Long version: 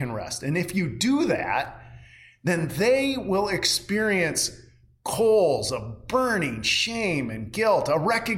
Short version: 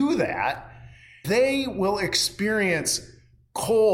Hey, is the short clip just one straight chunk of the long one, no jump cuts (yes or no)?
no